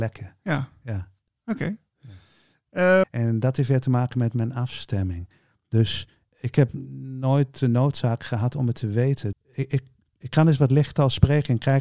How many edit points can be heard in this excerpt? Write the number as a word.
two